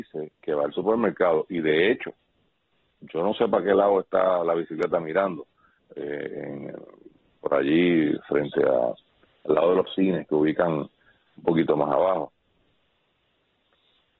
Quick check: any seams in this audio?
yes; 1 cut; at 5.8 s

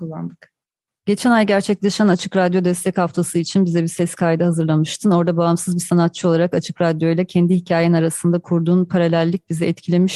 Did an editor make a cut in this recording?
no; 0 cuts

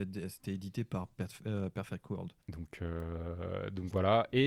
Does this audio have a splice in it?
yes; 1 cut; at 2.4 s

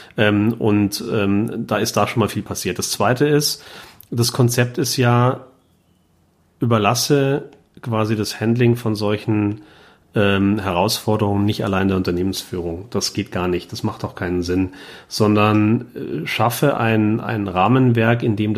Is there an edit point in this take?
no; 0 cuts

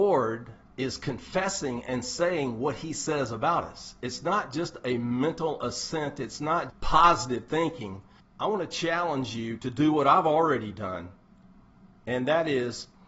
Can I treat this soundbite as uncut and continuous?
no; 2 cuts; at 6.7 s, 8.2 s

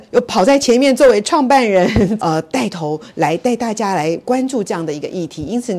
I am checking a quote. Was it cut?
yes; 1 cut; at 2.2 s

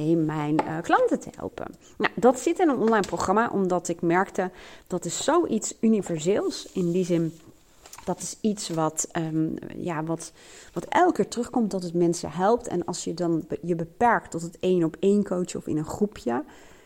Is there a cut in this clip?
no; 0 cuts

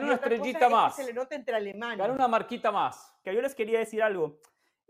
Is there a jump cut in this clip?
yes; 1 cut; at 3.2 s

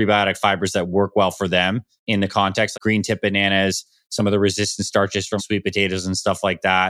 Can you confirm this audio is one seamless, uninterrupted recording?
no; 2 cuts; at 2.7 s, 5.4 s

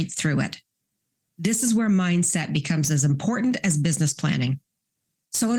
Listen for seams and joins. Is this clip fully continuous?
yes; 0 cuts

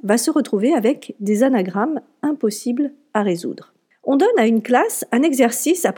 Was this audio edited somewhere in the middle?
yes; 1 cut; at 3.9 s

